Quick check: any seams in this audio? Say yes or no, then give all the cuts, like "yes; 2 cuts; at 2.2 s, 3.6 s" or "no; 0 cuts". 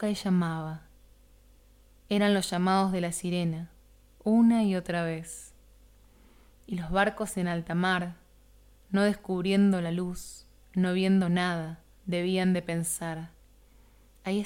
yes; 1 cut; at 12.0 s